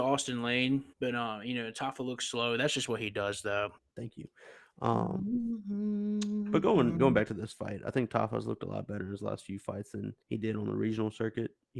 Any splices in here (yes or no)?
yes